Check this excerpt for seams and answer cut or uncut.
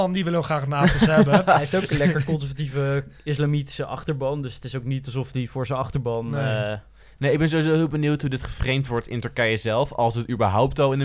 uncut